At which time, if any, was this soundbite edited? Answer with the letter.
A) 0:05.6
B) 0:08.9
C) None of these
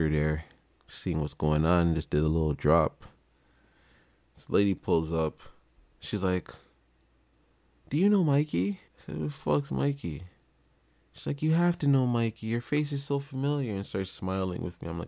B